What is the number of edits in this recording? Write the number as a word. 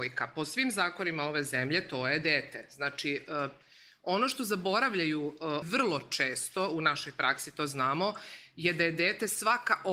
one